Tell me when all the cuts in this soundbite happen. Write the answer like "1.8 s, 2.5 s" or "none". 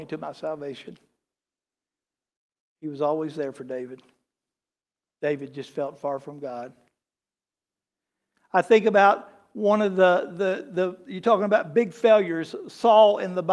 none